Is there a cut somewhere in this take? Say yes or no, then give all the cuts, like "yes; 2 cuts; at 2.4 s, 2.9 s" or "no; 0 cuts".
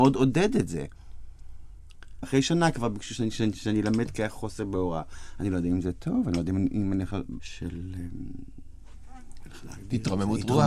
yes; 2 cuts; at 2.2 s, 7.4 s